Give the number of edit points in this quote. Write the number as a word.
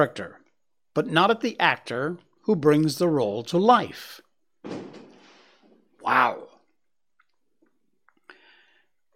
zero